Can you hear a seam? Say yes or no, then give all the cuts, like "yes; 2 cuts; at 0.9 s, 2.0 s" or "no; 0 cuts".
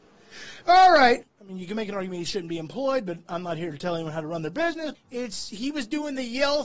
yes; 2 cuts; at 1.2 s, 4.9 s